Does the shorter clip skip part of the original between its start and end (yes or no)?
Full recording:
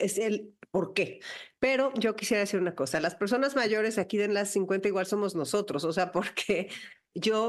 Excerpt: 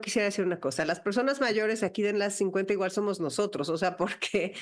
no